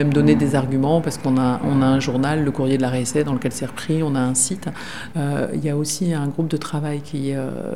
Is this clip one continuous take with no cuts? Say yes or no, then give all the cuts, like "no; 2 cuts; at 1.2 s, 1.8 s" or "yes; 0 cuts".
no; 2 cuts; at 1.6 s, 5.1 s